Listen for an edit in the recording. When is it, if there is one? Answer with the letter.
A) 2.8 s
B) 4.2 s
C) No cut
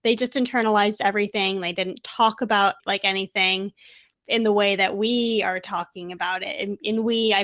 C